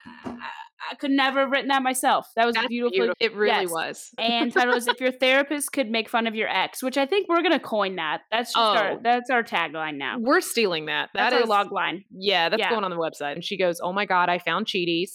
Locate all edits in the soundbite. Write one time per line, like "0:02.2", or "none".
0:03.1
0:04.2
0:13.4